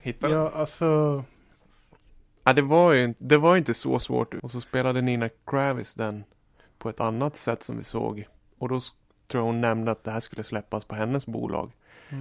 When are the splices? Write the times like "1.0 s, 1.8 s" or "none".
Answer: 4.4 s